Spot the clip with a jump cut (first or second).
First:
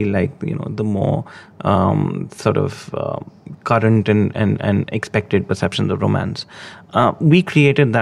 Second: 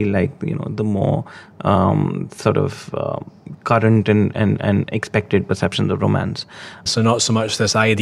second